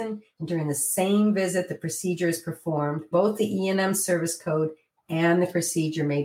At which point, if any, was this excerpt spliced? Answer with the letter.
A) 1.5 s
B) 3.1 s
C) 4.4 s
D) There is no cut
B